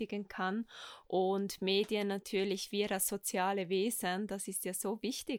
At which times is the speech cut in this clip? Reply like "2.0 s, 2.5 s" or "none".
none

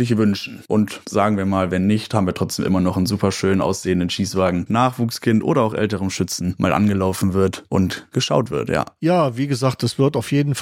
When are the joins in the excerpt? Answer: 4.7 s

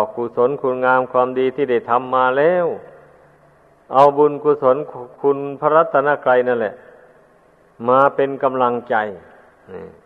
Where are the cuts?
none

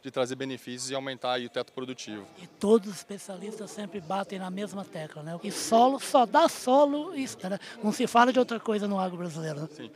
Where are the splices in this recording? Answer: 5.4 s, 7.4 s

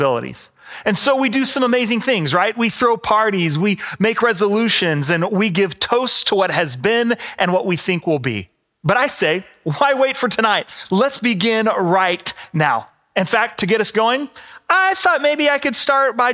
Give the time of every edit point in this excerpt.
none

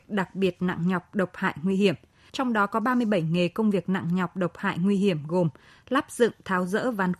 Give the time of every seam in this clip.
2.3 s

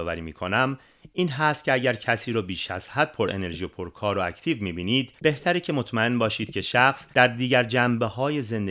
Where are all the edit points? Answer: 5.2 s, 7.1 s

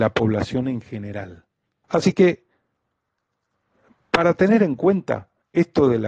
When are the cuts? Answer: 1.8 s

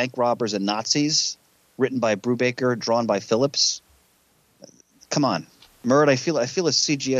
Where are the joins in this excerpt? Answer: 5.6 s

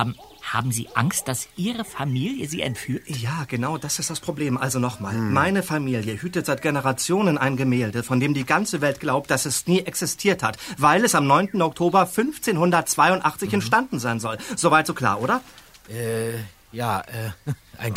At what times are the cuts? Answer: none

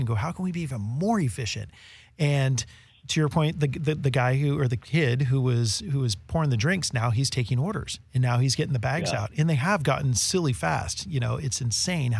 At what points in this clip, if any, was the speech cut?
none

